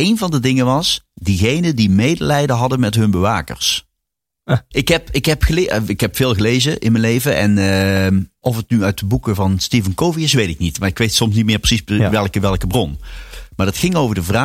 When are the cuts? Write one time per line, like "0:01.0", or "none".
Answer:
0:04.7
0:08.4